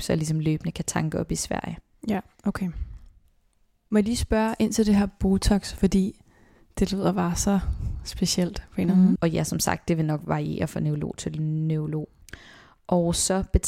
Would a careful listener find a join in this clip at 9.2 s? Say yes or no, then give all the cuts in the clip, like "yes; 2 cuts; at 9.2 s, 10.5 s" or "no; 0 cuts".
yes; 1 cut; at 9.2 s